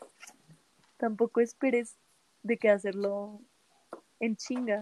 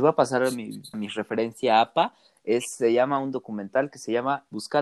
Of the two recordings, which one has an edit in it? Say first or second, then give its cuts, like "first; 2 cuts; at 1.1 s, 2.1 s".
second; 1 cut; at 0.9 s